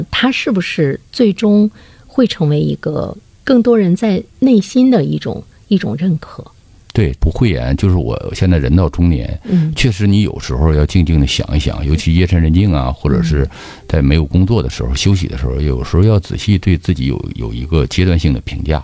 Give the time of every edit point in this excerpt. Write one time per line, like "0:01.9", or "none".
none